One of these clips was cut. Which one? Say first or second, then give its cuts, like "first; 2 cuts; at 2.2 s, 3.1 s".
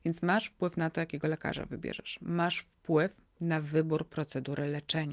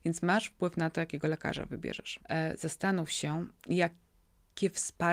second; 2 cuts; at 2.2 s, 3.6 s